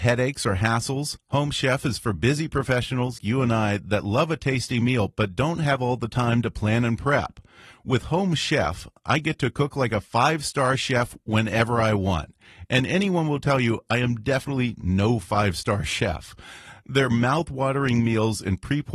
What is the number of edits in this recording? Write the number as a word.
one